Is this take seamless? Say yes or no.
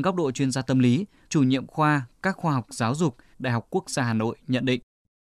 no